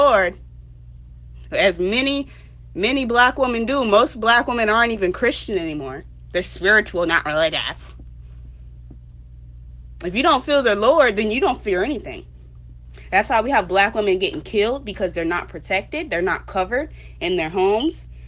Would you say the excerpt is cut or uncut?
uncut